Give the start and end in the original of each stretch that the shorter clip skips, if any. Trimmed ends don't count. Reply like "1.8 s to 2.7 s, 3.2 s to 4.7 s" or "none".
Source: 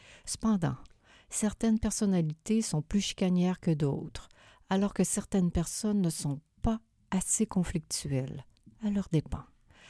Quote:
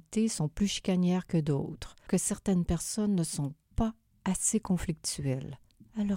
4.4 s to 4.9 s